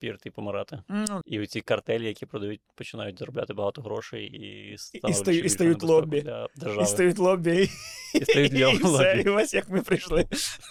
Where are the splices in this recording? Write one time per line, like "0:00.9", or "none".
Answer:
0:01.2